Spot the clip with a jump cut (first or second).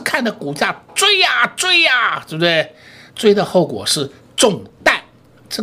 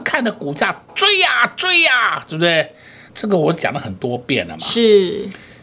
second